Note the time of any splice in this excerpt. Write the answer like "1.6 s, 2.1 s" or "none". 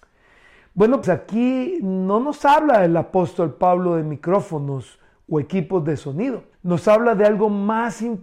1.0 s, 6.5 s